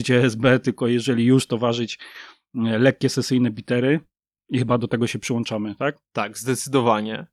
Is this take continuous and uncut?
yes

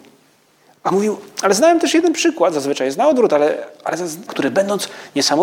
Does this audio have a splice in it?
yes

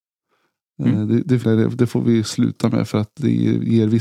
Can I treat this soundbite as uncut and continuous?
no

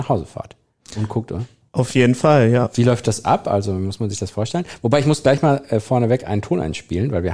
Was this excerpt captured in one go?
yes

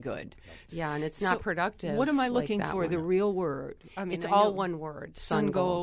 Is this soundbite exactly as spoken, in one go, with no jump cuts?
yes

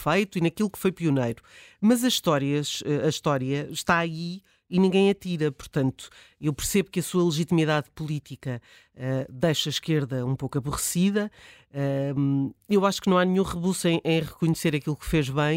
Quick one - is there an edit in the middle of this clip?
no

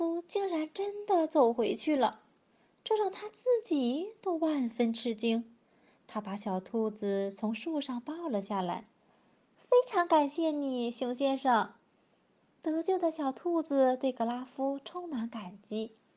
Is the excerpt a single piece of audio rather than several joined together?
yes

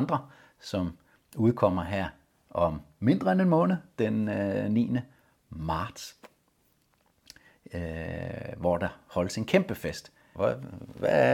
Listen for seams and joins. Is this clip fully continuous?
no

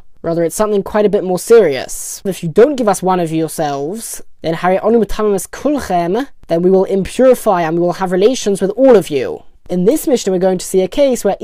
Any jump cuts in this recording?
yes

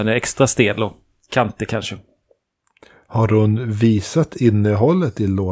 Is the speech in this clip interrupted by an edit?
no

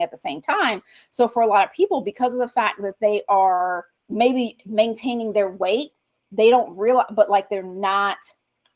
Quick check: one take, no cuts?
no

